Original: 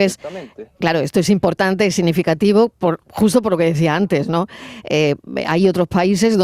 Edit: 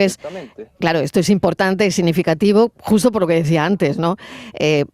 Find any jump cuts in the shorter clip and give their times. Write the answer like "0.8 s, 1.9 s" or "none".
2.7 s

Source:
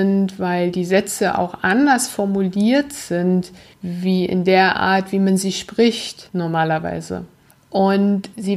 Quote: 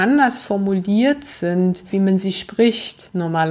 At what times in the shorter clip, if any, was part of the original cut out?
1.9 s

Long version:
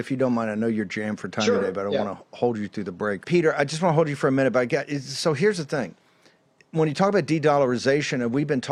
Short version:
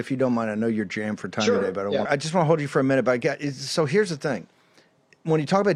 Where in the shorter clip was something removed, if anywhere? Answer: 2.1 s

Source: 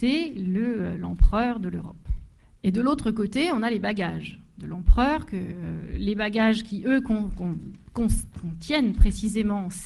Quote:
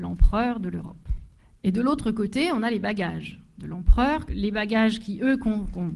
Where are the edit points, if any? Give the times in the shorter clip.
4.3 s

